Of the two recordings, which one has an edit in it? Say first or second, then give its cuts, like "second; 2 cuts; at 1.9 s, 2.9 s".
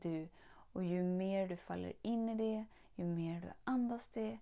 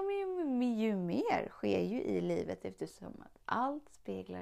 first; 1 cut; at 2.8 s